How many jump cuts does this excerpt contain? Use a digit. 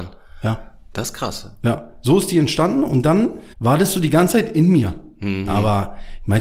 2